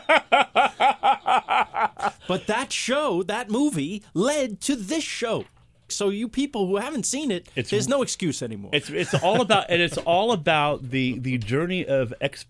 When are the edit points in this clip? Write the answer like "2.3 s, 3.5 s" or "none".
5.9 s